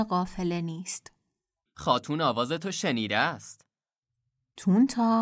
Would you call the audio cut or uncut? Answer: cut